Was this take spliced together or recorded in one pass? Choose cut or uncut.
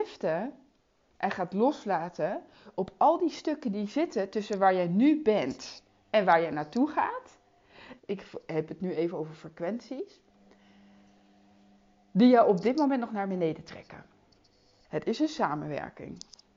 cut